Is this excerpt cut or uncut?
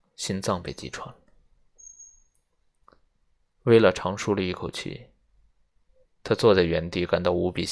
cut